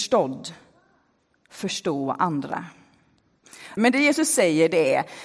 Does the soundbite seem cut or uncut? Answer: cut